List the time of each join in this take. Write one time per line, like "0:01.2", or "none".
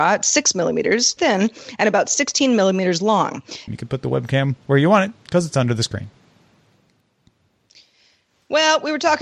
0:01.2
0:03.7